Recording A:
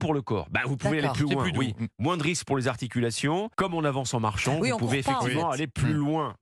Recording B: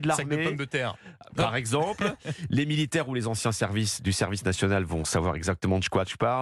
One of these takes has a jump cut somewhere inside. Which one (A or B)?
A